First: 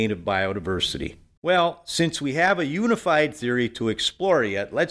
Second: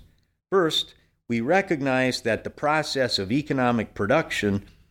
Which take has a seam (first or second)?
first